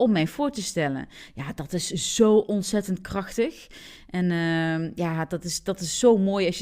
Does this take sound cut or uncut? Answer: uncut